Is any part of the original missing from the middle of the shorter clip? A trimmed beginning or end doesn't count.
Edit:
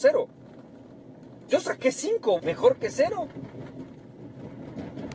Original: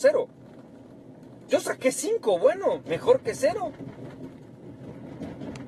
yes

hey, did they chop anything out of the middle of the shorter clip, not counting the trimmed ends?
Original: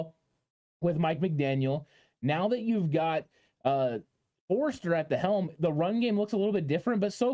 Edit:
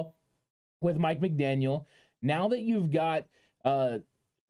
no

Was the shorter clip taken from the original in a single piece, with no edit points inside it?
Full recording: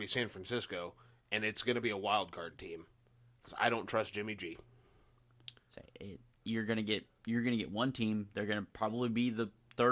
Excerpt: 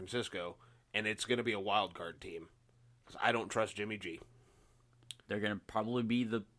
no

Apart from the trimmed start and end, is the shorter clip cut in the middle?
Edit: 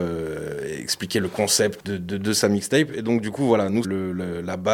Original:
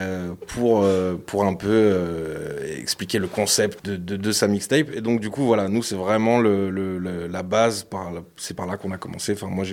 yes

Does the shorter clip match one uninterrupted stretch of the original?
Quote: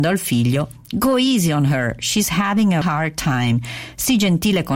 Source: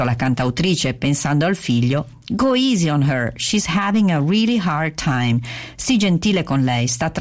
no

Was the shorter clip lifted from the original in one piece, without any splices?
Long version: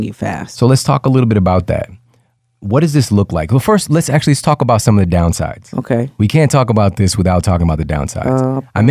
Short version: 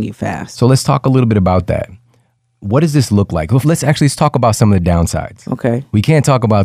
no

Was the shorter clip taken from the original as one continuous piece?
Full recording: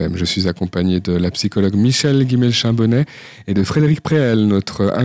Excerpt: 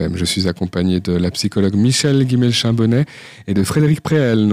yes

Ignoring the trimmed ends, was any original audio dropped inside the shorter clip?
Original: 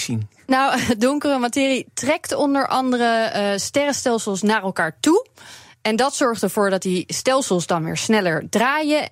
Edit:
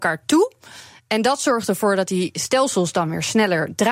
no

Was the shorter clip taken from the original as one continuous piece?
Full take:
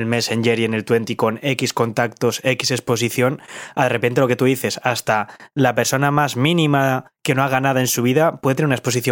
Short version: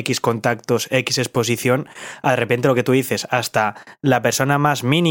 yes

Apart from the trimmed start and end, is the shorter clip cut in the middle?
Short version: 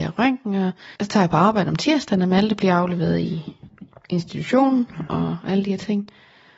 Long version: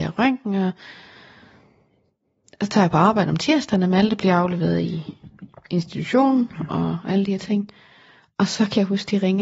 yes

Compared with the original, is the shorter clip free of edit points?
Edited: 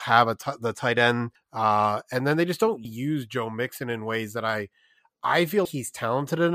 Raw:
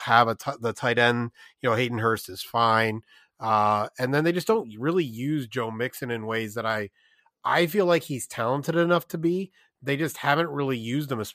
no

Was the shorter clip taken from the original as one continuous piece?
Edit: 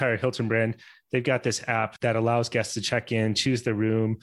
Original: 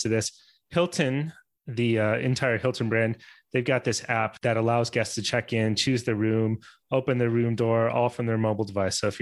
yes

